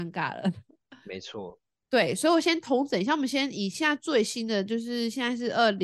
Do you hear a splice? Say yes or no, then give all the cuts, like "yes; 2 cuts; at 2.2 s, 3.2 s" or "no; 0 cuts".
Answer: no; 0 cuts